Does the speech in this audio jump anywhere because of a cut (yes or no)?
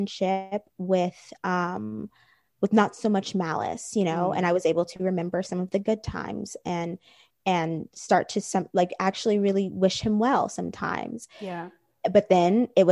no